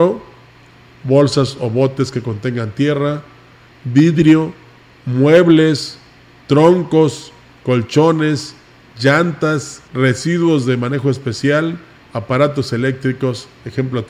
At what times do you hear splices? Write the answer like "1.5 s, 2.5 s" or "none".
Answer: 9.9 s, 12.0 s

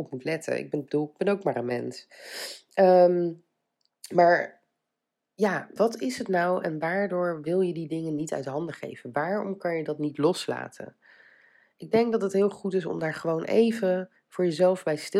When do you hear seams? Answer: 5.8 s

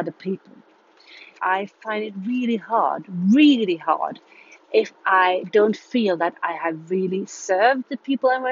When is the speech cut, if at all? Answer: 1.4 s

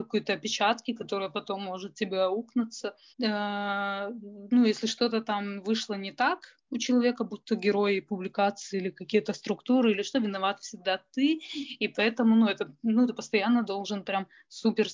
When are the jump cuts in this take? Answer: 3.1 s

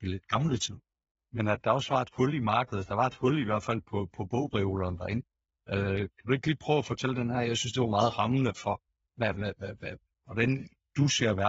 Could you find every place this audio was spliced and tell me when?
none

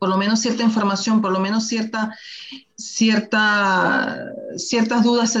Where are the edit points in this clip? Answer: none

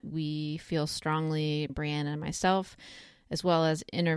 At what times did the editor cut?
1.7 s

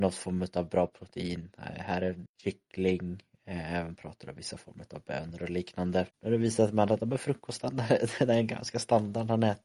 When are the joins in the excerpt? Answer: 2.3 s, 6.1 s

